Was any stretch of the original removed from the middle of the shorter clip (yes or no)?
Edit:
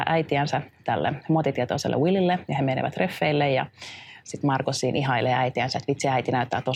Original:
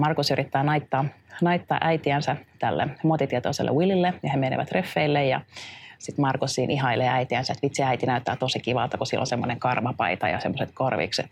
no